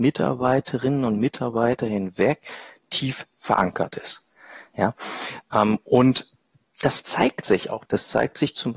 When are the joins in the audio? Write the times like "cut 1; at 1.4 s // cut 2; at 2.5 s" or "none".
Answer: cut 1; at 7.9 s